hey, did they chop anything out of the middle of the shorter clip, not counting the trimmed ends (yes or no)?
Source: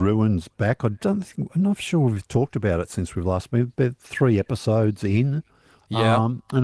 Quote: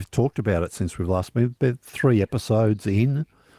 no